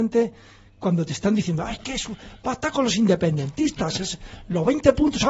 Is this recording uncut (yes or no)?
yes